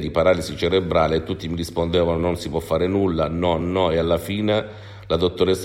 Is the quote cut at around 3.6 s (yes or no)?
yes